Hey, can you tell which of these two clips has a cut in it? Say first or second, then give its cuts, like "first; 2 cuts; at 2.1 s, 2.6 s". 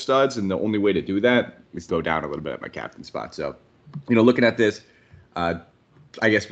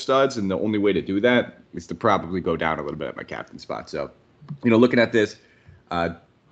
first; 1 cut; at 1.9 s